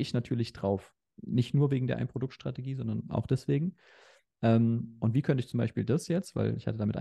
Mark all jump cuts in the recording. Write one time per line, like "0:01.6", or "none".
0:01.1